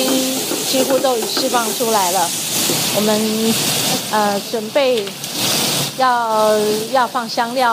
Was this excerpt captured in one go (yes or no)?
yes